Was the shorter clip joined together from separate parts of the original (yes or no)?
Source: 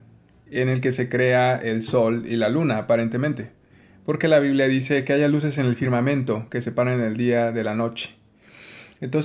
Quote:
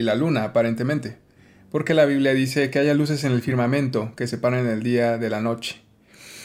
no